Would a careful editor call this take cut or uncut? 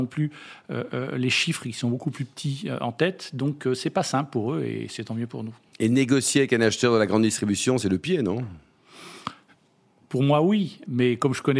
uncut